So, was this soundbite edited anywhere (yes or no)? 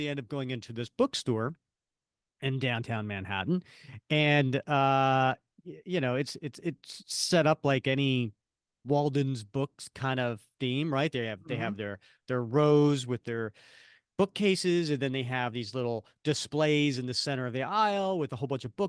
yes